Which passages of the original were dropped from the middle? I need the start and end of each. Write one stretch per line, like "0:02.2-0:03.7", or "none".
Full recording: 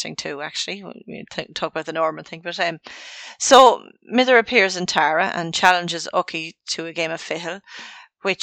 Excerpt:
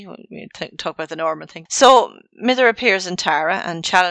0:02.4-0:03.3